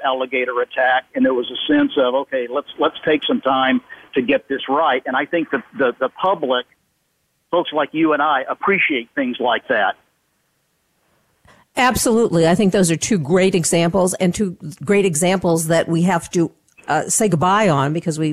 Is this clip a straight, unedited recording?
yes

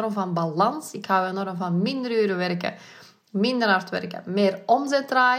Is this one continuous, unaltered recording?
yes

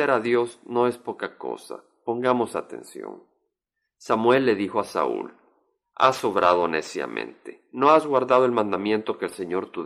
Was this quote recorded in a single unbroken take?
yes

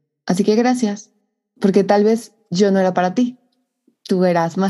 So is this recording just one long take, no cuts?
yes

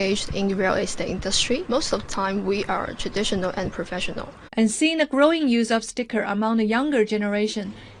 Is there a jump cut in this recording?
yes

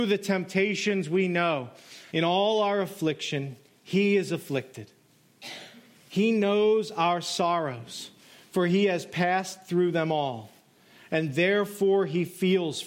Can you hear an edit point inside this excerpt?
yes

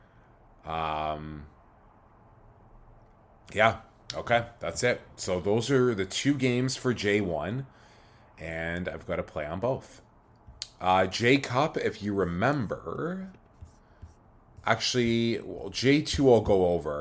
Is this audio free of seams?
yes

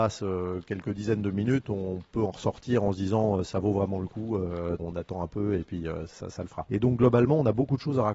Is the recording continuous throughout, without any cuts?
no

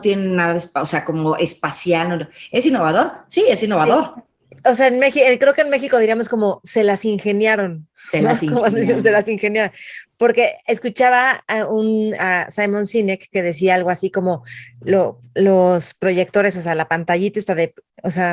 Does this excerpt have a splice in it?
no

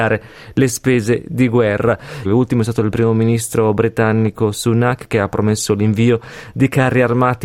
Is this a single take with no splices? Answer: no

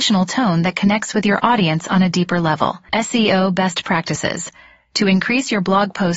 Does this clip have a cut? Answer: yes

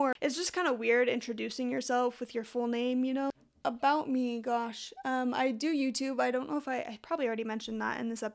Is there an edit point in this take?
no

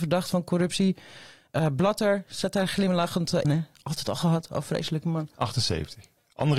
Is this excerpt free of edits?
no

